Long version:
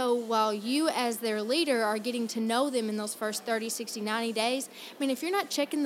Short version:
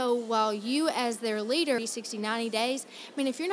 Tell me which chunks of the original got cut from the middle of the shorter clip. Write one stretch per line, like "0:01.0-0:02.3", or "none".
0:01.8-0:03.6